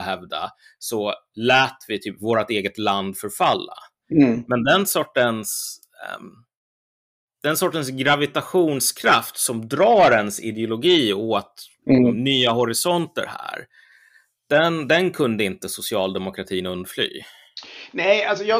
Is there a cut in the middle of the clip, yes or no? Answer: no